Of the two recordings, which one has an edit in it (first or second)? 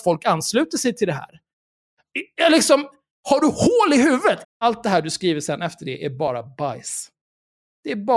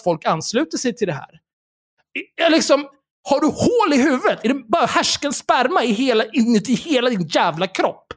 first